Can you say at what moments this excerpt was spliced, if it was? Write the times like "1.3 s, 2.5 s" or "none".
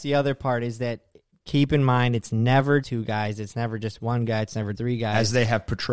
2.8 s, 4.7 s